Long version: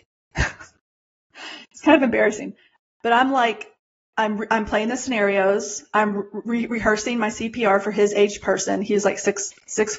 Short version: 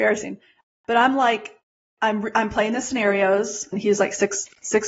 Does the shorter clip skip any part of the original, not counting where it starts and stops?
yes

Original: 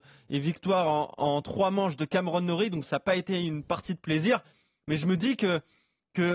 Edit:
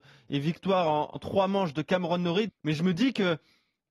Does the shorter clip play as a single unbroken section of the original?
no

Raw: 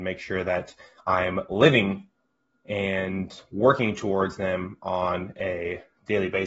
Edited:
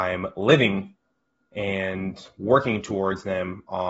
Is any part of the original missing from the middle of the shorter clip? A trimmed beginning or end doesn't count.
no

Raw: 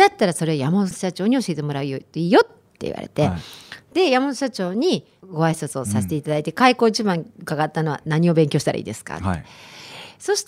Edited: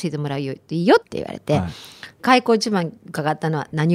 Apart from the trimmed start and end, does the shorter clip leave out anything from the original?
yes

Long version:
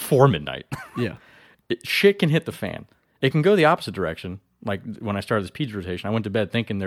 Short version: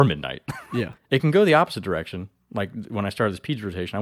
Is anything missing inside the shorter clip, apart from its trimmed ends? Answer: yes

